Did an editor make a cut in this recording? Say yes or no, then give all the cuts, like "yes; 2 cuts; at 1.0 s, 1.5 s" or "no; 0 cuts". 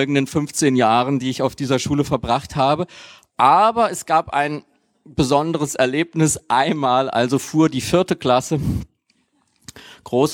no; 0 cuts